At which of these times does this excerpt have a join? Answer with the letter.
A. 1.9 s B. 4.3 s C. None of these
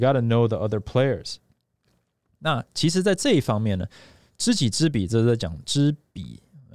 C